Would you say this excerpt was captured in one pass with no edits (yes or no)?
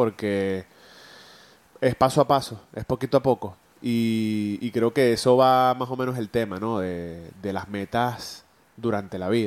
yes